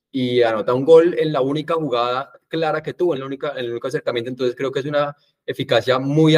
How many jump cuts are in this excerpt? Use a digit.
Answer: 1